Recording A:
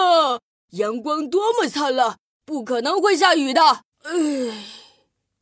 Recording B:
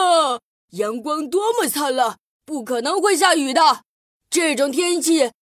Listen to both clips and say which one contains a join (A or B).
A